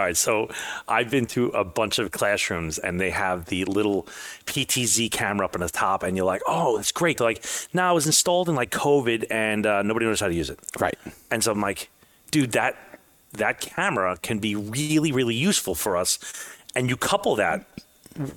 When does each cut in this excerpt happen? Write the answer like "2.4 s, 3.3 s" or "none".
7.2 s